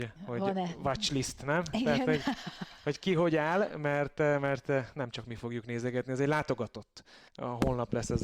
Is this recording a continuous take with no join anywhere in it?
no; 1 cut; at 7.3 s

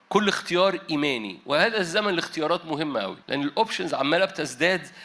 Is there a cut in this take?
yes; 1 cut; at 3.2 s

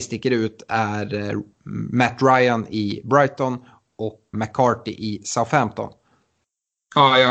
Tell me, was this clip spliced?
yes; 1 cut; at 4.3 s

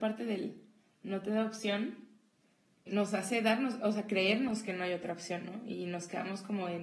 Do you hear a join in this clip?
yes; 1 cut; at 2.9 s

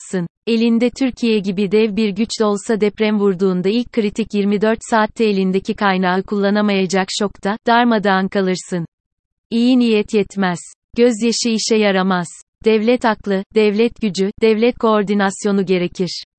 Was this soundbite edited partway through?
no; 0 cuts

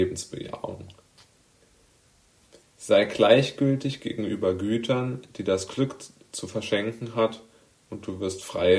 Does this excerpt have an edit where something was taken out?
yes; 1 cut; at 2.6 s

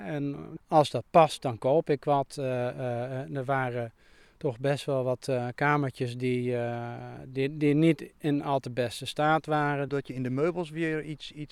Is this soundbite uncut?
no; 1 cut; at 9.9 s

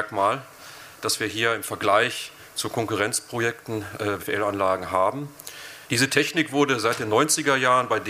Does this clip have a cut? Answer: yes; 2 cuts; at 4.2 s, 5.9 s

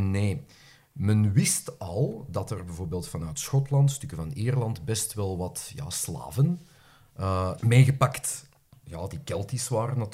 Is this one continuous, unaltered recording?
no; 1 cut; at 7.6 s

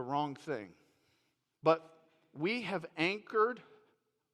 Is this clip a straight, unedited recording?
no; 1 cut; at 1.5 s

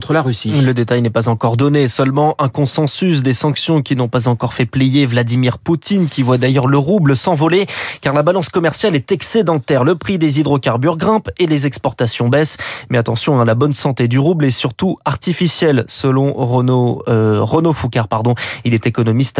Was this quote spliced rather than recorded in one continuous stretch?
no; 0 cuts

